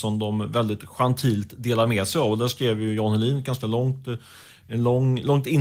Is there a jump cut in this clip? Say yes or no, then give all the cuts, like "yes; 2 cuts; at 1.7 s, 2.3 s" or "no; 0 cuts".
no; 0 cuts